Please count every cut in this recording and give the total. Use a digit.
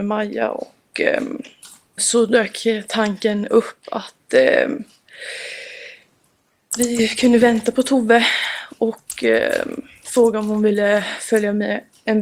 1